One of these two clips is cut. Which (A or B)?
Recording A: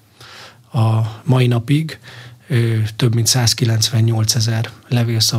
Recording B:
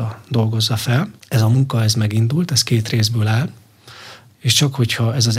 B